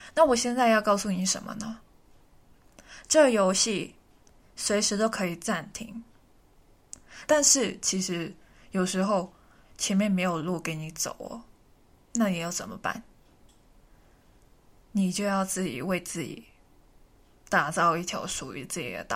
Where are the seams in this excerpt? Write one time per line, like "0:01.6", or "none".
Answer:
0:07.3